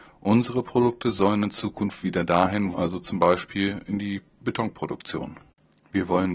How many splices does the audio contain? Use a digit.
1